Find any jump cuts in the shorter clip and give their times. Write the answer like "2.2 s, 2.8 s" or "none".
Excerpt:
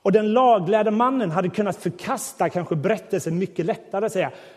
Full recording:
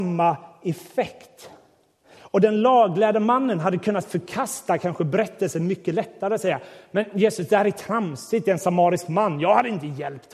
none